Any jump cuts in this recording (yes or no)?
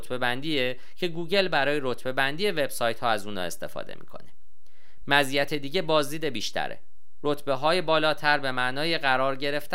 no